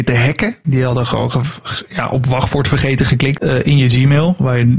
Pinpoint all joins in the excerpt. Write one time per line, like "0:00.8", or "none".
0:03.4